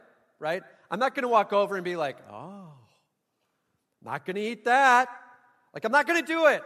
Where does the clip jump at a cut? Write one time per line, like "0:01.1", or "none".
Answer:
none